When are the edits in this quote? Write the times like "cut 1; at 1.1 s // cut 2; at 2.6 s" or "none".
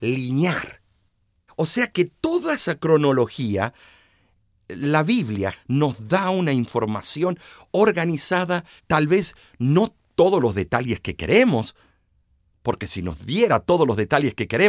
cut 1; at 1.5 s // cut 2; at 5.5 s // cut 3; at 8.8 s